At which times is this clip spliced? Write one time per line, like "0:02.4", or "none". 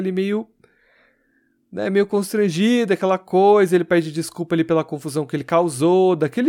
none

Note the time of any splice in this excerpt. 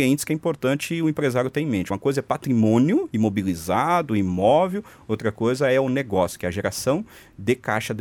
none

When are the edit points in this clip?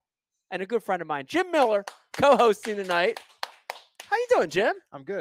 none

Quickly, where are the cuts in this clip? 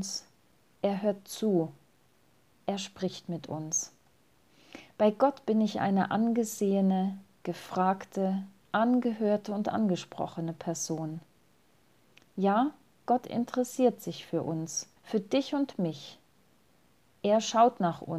0:15.0

